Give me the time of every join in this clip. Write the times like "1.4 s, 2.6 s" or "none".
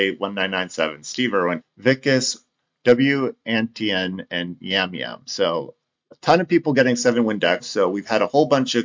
1.6 s, 7.6 s

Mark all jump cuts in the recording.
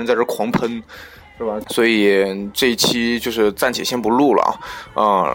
1.6 s

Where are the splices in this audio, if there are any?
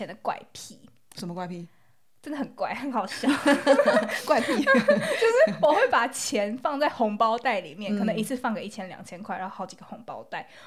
none

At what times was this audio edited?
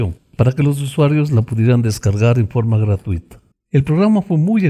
3.5 s

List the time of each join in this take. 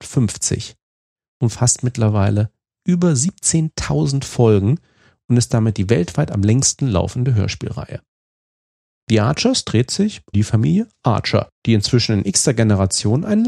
10.3 s, 11.6 s

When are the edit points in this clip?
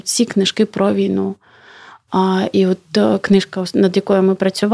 none

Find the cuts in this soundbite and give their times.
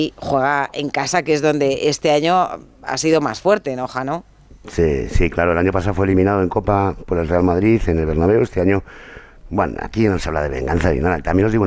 none

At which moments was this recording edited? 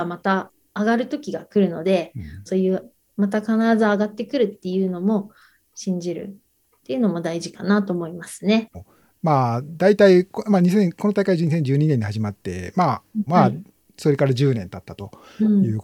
2.5 s, 8.7 s, 13.3 s

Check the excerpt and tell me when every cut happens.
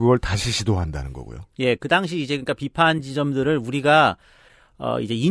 none

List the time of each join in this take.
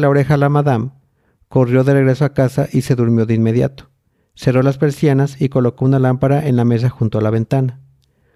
none

